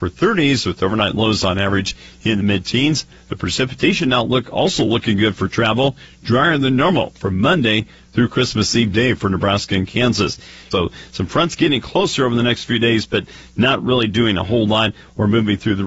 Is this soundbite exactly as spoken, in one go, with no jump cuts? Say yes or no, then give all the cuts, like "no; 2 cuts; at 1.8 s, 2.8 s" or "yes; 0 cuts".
no; 1 cut; at 10.7 s